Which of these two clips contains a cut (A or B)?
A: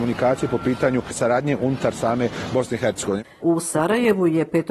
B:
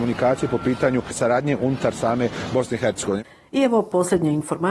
A